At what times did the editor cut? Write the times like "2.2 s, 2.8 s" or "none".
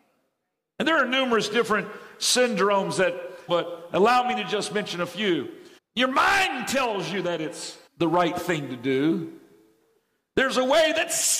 3.5 s, 5.8 s, 7.9 s